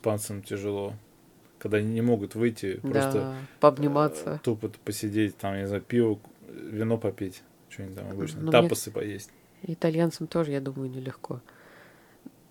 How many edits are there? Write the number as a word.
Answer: zero